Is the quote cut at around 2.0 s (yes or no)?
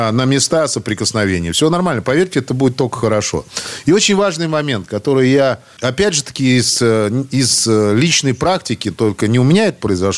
no